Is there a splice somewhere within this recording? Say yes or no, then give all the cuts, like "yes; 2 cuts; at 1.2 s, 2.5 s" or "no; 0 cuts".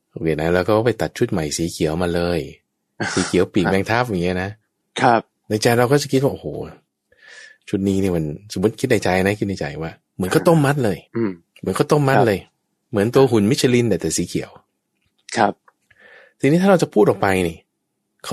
yes; 1 cut; at 11.1 s